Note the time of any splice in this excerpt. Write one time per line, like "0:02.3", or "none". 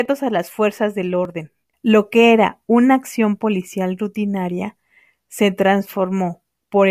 0:01.7